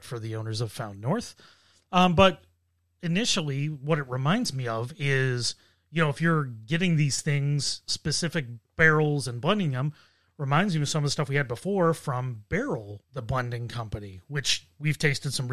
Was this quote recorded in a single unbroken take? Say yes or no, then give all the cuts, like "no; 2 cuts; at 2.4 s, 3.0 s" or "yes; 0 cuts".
no; 1 cut; at 13.0 s